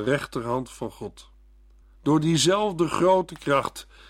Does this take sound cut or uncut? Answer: cut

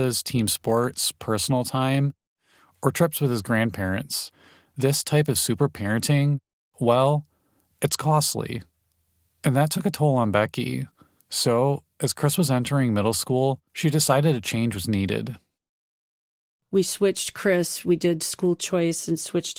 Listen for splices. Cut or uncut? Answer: uncut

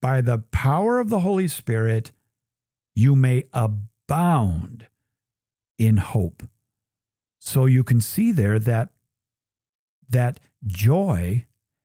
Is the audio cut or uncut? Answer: uncut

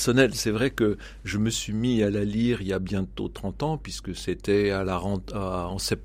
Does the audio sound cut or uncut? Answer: uncut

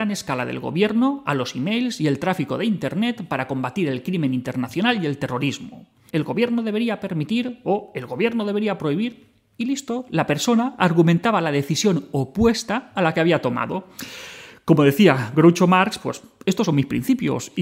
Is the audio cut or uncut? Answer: cut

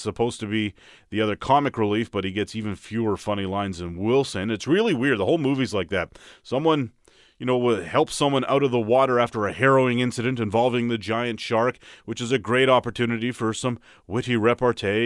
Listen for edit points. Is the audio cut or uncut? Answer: uncut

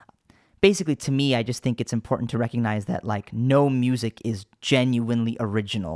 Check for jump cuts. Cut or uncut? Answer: uncut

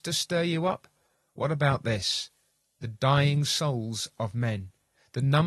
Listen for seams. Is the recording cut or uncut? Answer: uncut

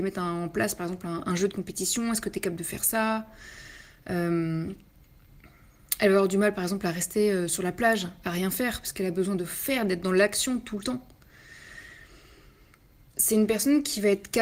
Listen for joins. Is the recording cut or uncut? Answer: cut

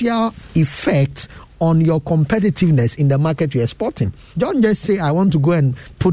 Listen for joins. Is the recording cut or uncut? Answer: cut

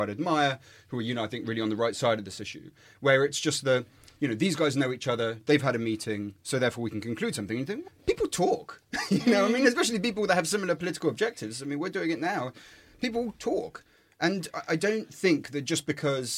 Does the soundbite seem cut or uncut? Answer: cut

